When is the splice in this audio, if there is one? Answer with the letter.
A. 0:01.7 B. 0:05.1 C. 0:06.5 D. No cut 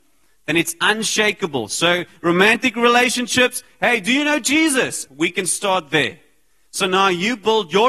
B